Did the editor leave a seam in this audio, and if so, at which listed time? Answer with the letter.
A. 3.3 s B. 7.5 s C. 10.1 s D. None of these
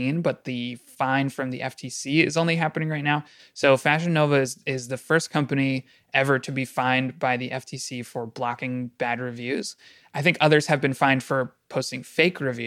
D